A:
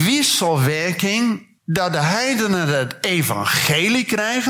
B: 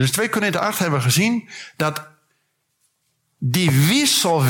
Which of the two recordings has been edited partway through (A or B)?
A